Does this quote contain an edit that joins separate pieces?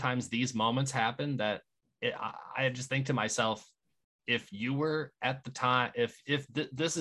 no; 0 cuts

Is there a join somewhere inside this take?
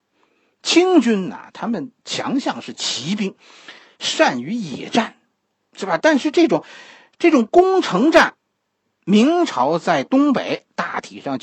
yes; 1 cut; at 9.0 s

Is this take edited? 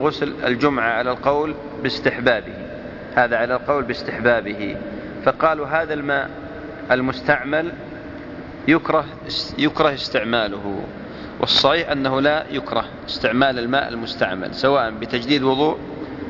no; 0 cuts

